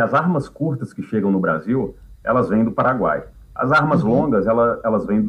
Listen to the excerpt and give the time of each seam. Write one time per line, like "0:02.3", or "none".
none